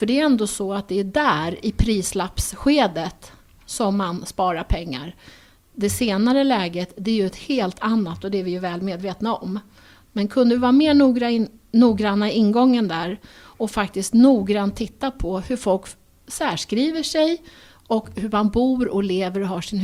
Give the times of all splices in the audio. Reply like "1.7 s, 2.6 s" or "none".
none